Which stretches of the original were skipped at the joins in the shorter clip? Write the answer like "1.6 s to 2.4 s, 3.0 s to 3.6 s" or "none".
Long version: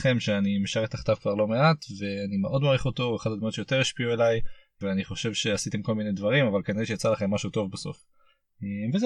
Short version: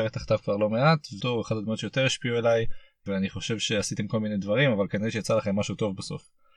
2.0 s to 3.0 s